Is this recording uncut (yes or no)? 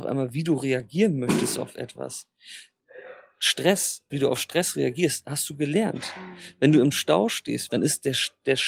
no